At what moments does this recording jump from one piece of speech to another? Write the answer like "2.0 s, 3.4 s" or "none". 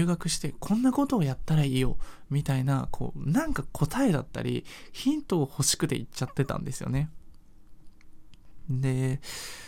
none